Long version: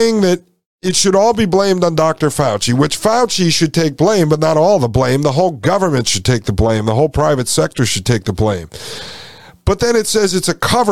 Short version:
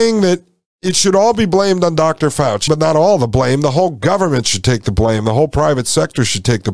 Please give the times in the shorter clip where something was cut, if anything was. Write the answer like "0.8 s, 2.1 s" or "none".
2.7 s